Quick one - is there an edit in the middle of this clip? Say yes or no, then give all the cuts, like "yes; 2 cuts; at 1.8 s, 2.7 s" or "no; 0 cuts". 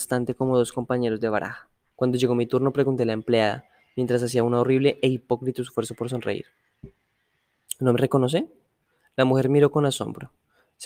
yes; 1 cut; at 1.9 s